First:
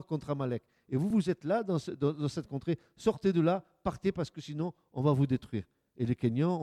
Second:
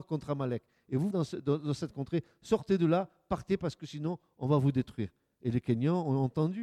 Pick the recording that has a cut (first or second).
second